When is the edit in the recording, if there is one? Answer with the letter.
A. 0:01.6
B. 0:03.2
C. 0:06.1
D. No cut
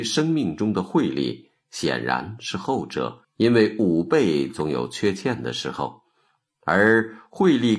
B